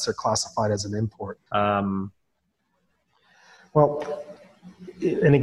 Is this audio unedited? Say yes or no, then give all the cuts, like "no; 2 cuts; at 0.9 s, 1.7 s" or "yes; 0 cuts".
no; 1 cut; at 1.4 s